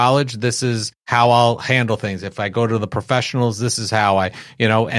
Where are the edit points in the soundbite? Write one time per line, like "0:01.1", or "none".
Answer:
none